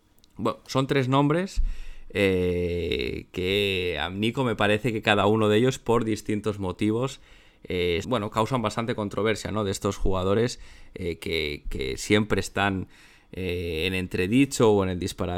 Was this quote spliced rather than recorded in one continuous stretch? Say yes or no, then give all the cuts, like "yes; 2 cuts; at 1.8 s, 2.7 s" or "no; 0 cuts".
yes; 2 cuts; at 8.0 s, 11.6 s